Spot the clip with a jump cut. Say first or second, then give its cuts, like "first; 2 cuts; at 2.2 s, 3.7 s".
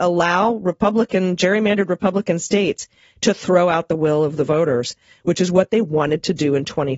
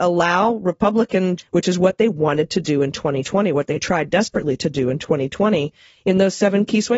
second; 1 cut; at 1.4 s